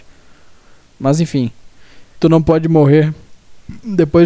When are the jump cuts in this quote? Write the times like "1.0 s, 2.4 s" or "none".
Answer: 0.9 s, 2.2 s